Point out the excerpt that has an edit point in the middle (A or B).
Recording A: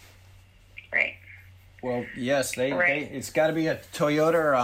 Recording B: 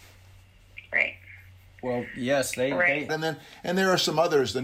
B